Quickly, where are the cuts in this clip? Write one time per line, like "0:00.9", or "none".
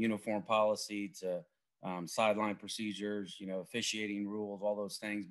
none